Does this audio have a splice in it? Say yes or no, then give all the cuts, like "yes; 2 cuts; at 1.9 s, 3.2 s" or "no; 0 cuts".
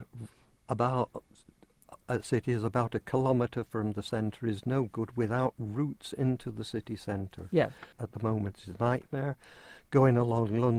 yes; 1 cut; at 7.9 s